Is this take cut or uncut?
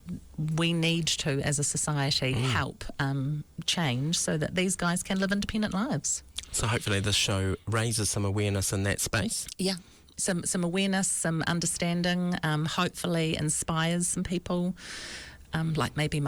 uncut